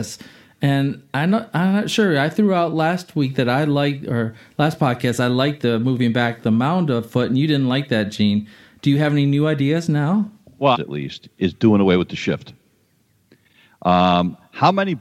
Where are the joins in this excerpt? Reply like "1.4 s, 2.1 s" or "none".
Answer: 10.7 s